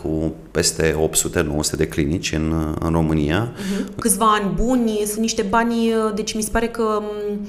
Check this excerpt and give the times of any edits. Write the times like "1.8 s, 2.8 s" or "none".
4.0 s

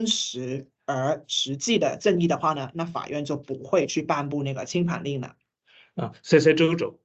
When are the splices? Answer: none

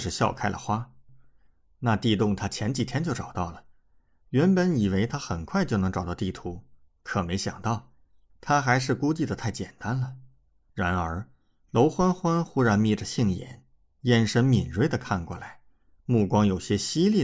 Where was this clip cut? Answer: 1.1 s, 10.7 s

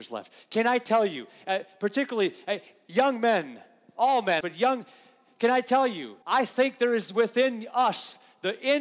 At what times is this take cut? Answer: 4.4 s, 6.2 s

